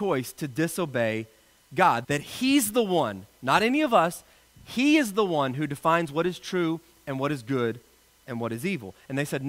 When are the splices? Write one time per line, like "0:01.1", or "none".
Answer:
0:02.0

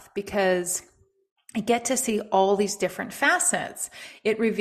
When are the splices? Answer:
none

